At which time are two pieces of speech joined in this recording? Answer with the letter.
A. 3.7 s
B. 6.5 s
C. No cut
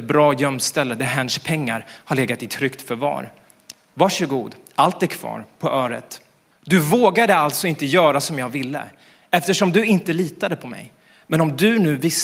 B